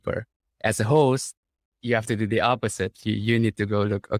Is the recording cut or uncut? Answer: uncut